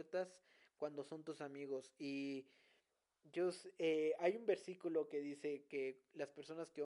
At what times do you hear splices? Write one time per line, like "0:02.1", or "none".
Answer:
none